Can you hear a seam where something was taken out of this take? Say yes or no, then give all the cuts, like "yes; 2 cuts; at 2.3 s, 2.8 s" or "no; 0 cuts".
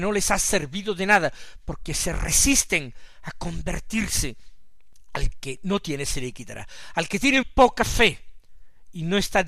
yes; 1 cut; at 7.4 s